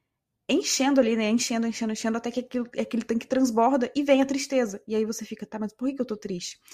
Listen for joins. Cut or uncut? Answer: uncut